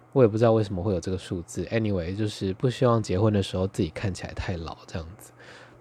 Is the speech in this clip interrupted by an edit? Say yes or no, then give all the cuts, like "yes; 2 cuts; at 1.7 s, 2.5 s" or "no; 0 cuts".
no; 0 cuts